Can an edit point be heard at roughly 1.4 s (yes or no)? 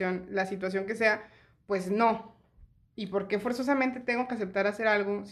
no